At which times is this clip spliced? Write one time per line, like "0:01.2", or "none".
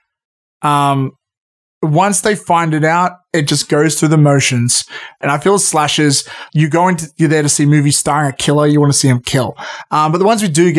0:05.2
0:06.5